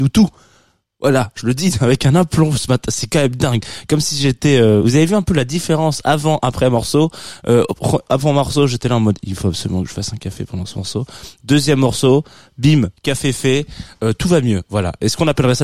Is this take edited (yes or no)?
no